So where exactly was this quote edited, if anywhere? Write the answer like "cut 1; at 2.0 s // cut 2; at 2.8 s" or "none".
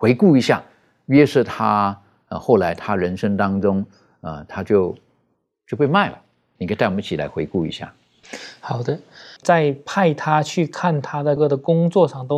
cut 1; at 6.6 s // cut 2; at 9.4 s // cut 3; at 11.4 s